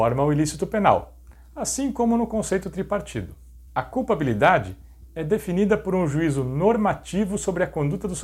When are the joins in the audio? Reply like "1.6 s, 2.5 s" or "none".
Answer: 3.7 s